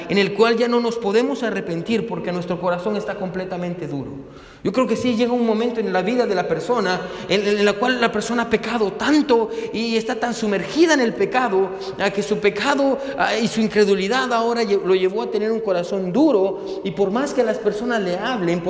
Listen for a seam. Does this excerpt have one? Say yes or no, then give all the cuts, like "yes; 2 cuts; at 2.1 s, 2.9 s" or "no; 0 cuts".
no; 0 cuts